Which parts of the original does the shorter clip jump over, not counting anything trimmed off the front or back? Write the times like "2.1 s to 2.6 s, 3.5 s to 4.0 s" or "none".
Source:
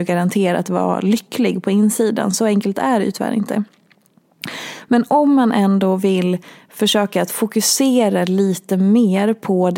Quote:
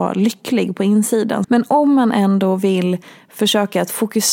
2.3 s to 4.8 s